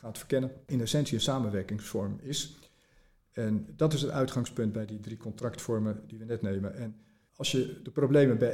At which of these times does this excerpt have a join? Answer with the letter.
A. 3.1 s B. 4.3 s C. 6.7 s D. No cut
D